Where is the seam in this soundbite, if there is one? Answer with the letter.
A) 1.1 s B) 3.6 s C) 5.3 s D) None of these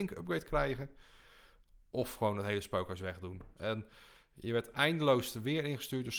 B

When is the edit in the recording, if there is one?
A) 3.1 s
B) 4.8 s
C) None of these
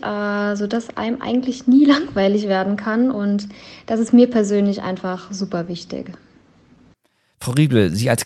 C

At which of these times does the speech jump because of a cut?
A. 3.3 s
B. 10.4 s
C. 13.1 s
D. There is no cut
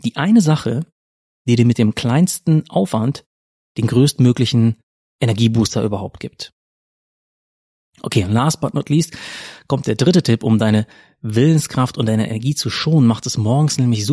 D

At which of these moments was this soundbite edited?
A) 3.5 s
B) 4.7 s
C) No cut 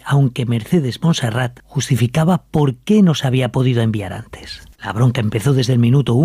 B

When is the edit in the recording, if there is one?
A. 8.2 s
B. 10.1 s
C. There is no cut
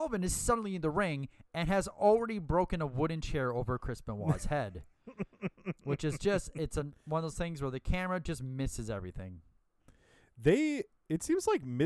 C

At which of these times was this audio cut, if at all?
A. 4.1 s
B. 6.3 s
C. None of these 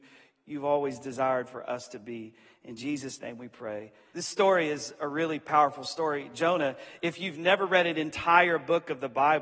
A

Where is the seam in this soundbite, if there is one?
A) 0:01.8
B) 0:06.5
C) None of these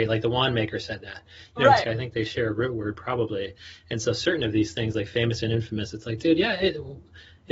A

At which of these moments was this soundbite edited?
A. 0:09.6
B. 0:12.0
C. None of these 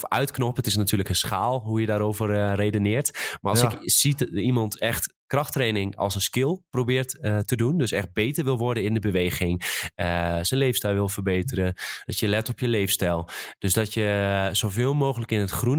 B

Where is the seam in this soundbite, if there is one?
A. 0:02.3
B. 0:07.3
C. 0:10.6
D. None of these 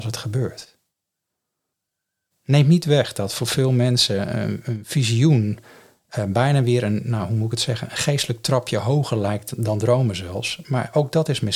D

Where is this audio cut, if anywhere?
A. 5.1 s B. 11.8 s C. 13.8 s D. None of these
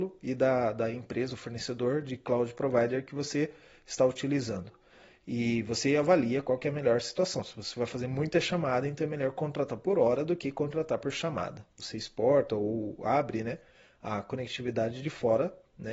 B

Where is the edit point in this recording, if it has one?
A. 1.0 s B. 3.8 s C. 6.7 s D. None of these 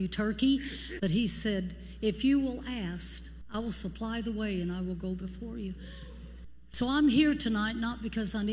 A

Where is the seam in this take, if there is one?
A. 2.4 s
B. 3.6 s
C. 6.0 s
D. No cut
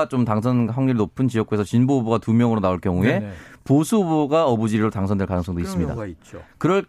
D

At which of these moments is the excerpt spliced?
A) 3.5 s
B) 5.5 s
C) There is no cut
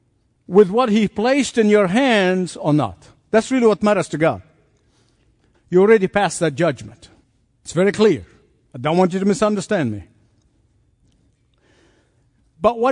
B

